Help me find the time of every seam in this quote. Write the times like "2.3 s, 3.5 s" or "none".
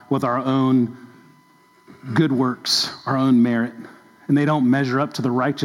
none